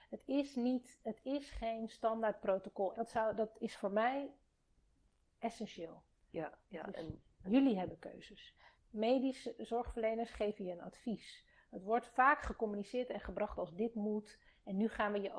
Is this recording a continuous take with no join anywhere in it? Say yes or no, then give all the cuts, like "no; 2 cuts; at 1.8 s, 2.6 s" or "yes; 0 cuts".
no; 3 cuts; at 2.9 s, 6.7 s, 8.8 s